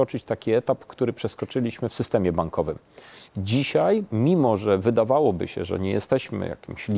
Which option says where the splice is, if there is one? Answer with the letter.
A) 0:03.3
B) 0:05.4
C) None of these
A